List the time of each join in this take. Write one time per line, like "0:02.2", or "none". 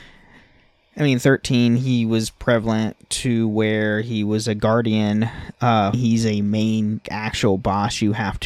0:05.9
0:07.0

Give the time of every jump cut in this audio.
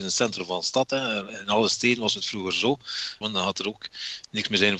0:03.2

